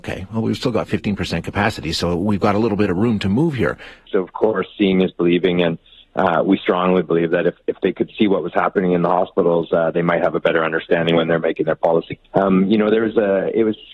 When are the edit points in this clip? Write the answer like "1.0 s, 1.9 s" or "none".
4.1 s, 12.2 s